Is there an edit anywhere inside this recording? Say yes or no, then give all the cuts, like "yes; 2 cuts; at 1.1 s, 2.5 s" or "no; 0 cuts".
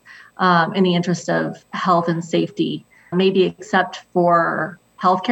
yes; 1 cut; at 3.1 s